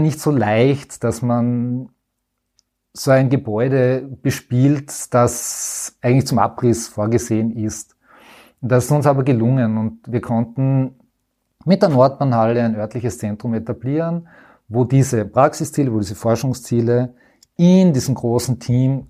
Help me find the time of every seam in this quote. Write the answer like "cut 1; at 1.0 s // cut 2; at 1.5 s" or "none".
none